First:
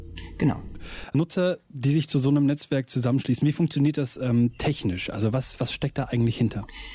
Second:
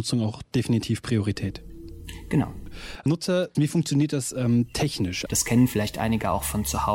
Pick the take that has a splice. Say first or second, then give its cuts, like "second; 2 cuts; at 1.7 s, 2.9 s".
second; 2 cuts; at 3.5 s, 5.3 s